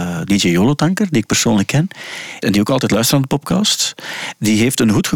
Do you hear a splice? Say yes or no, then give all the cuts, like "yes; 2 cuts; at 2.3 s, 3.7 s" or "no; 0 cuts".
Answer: yes; 1 cut; at 2.4 s